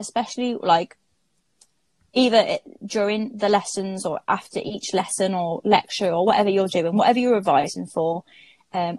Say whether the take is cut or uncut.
uncut